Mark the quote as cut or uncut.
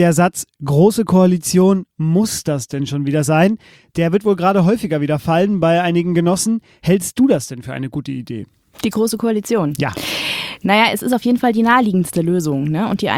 uncut